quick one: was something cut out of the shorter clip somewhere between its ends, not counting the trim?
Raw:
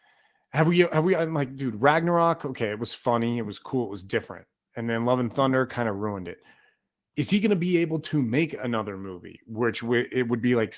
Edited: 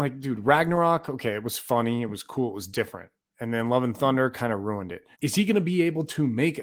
yes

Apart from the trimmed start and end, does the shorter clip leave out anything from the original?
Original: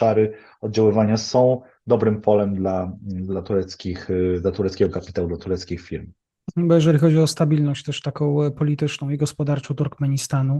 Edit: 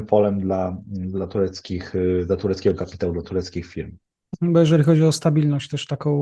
no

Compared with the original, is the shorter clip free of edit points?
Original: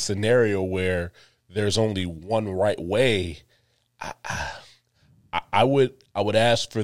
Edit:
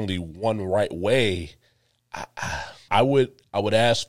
no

